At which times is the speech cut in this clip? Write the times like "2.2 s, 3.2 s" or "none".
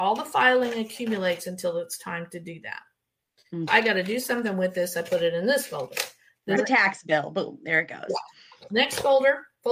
3.7 s, 6.6 s